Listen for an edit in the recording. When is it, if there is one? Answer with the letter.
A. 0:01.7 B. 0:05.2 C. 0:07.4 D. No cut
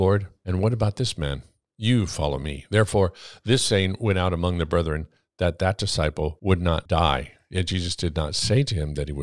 A